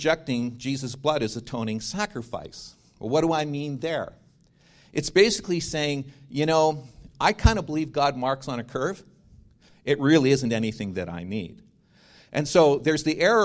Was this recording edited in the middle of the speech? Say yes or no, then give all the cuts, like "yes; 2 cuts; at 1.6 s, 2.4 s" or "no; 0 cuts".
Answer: yes; 2 cuts; at 7.1 s, 9.7 s